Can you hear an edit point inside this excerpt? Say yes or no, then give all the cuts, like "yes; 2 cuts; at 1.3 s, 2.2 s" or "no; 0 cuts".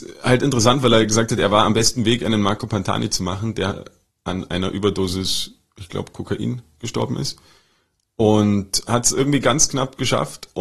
no; 0 cuts